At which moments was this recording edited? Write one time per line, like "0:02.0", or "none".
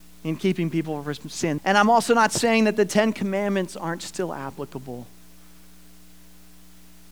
0:01.6